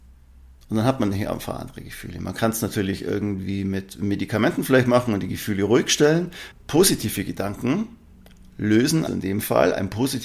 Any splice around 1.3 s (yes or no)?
no